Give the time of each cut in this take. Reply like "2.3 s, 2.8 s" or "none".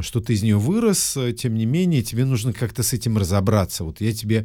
none